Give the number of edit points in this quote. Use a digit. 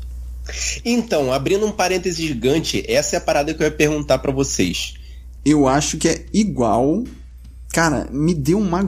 2